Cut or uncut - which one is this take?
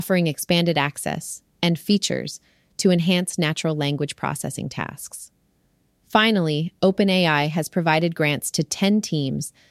uncut